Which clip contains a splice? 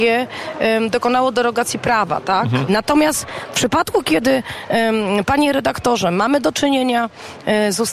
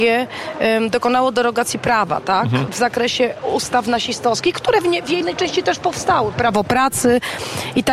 first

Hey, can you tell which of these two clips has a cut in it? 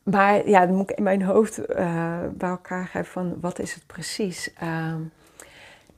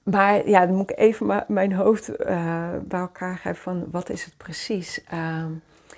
first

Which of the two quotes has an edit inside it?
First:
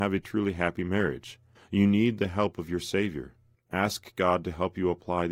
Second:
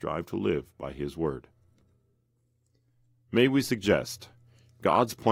first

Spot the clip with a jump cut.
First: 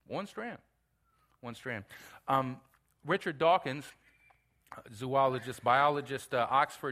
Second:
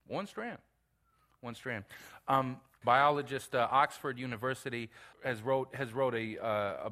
second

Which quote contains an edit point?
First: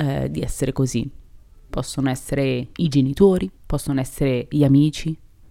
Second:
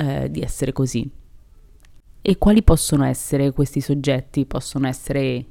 first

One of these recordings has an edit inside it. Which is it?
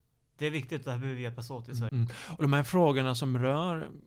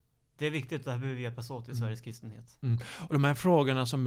first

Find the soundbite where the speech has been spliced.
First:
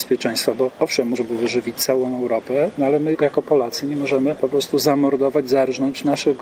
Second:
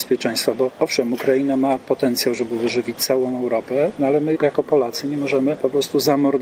first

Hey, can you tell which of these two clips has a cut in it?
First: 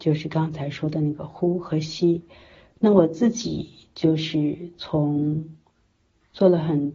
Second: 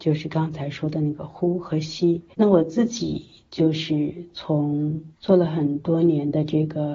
second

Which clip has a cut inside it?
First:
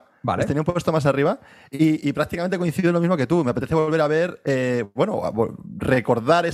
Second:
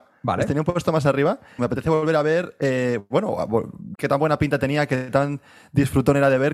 second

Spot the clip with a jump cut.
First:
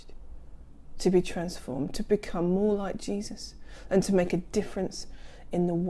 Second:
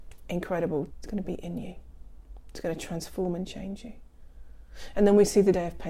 second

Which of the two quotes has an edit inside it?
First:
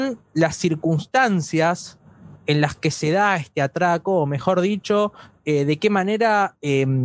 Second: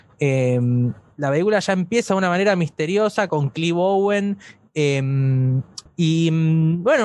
second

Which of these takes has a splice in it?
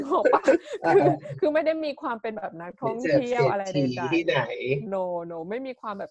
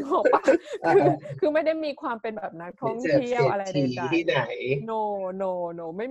first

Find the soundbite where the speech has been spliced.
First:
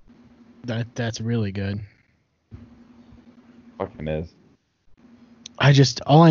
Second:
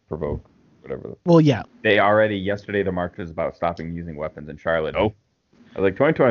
second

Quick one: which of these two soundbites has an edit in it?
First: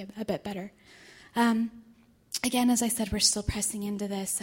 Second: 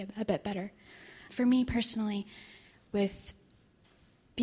second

